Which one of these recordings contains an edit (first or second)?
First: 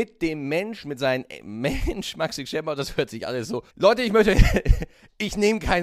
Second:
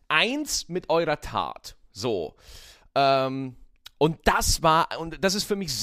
first